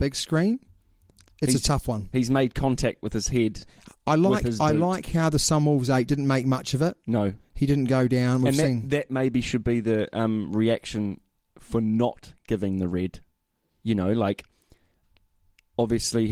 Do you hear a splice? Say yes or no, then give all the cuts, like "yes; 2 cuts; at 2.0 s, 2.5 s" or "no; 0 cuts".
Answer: no; 0 cuts